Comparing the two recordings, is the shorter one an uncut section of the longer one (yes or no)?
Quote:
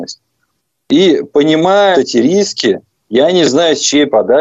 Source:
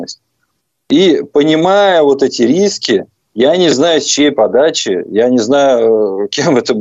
no